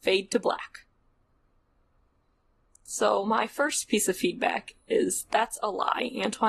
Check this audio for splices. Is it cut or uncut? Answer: uncut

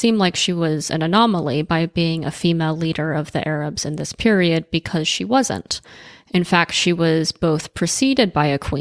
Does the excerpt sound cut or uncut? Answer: uncut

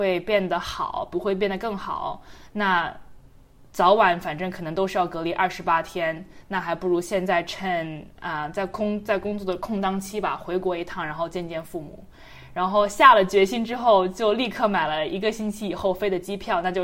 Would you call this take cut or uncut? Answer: uncut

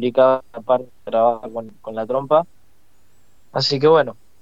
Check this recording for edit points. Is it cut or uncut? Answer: uncut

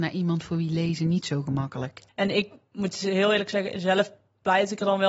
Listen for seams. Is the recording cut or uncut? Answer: cut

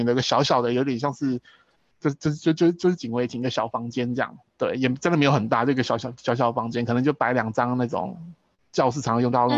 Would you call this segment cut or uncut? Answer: uncut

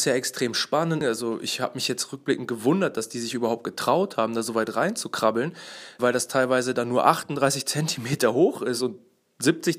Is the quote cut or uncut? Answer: cut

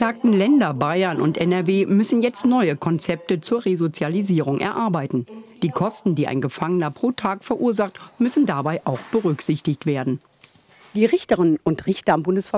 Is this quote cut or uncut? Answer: uncut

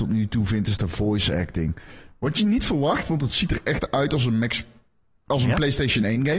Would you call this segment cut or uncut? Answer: uncut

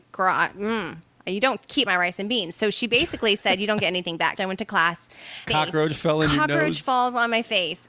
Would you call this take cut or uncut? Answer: cut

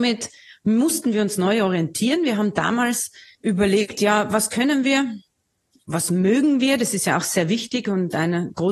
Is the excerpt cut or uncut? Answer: uncut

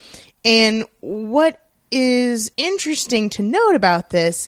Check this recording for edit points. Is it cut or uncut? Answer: uncut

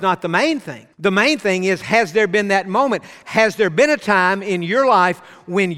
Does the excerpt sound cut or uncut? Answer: cut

